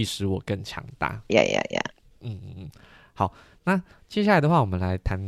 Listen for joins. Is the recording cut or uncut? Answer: cut